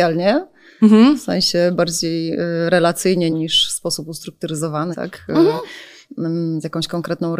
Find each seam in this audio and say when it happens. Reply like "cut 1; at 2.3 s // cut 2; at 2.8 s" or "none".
cut 1; at 3.3 s // cut 2; at 4.9 s